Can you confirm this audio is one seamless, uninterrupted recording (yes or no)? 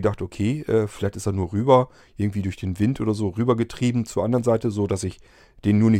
yes